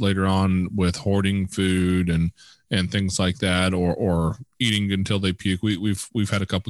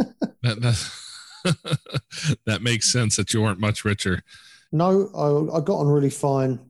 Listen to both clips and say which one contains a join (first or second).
second